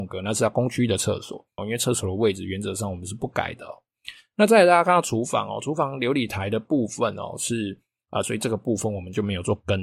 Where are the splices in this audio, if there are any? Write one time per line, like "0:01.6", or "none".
0:01.6
0:08.2